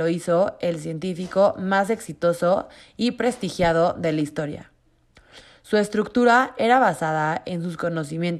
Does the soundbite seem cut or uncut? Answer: uncut